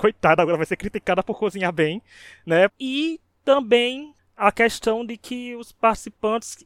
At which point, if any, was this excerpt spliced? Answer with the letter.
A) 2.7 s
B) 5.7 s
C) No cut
A